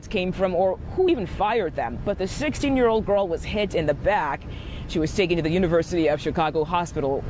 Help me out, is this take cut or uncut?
uncut